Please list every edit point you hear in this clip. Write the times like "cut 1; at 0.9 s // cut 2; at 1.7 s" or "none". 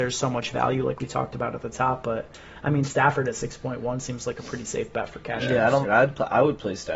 cut 1; at 5.8 s